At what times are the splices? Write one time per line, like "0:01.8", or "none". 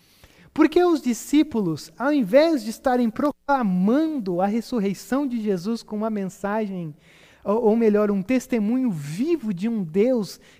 none